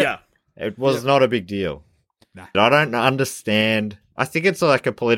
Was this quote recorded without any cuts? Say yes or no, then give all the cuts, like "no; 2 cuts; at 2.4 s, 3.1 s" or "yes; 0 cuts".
no; 1 cut; at 2.5 s